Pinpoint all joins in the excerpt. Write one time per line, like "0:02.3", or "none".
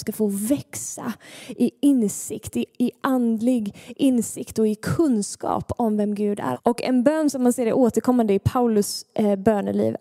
0:06.5